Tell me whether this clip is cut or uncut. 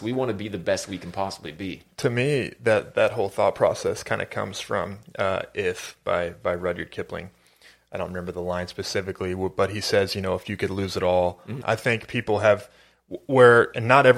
cut